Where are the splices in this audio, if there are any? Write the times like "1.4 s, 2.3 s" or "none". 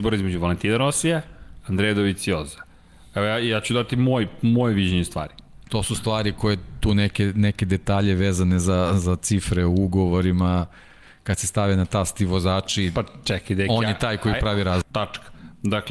5.7 s, 14.8 s

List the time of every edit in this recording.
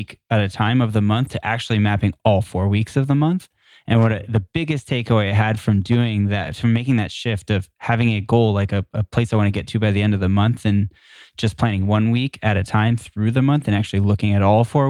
none

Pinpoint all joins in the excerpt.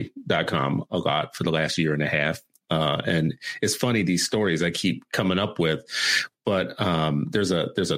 none

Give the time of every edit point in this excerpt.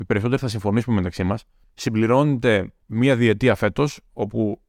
2.8 s

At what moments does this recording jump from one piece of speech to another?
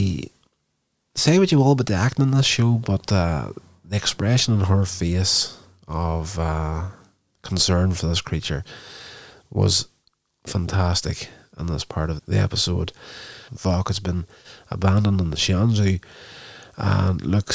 12.2 s, 13.5 s

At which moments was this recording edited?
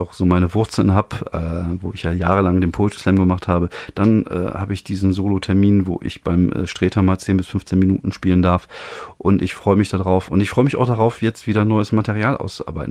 none

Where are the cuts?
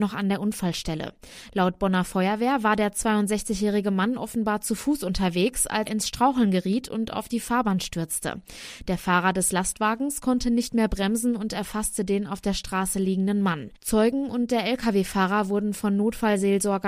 5.9 s

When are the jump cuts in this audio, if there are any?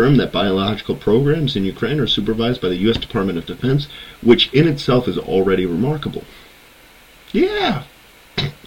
none

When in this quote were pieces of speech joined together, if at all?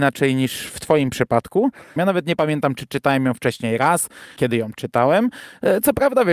2.0 s, 4.4 s

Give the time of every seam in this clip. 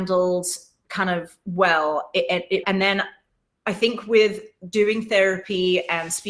2.6 s

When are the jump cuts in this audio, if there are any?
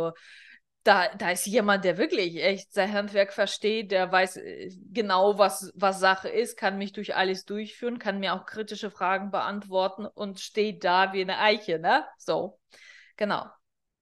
none

